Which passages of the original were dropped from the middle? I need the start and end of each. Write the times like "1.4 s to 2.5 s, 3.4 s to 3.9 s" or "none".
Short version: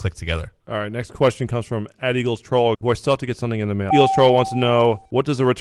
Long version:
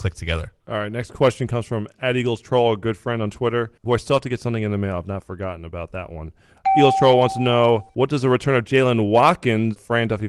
2.7 s to 3.8 s, 4.9 s to 6.7 s